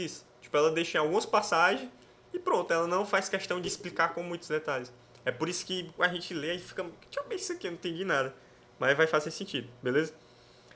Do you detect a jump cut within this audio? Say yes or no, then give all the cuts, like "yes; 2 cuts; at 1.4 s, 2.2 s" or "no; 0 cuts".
yes; 1 cut; at 6.0 s